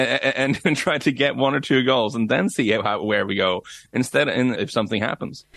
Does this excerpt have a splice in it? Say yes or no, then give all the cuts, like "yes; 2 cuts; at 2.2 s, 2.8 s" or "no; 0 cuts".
yes; 1 cut; at 4.5 s